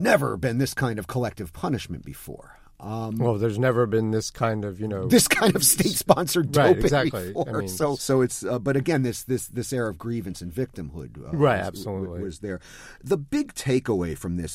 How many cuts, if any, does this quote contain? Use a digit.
1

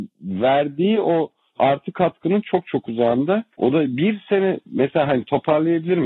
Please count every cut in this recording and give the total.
1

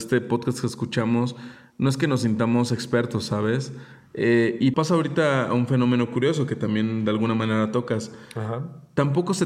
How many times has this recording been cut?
1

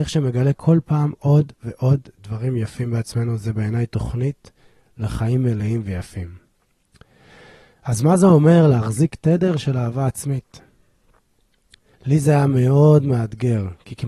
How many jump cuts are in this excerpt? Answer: 1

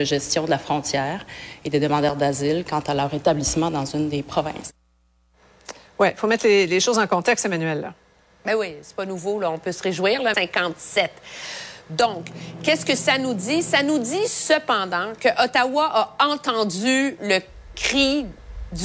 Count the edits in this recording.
1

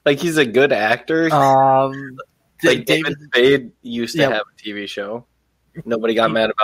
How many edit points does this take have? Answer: 1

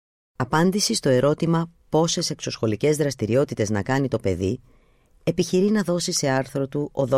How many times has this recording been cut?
0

